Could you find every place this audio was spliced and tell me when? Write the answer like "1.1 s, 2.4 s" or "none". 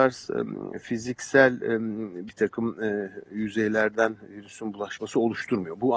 none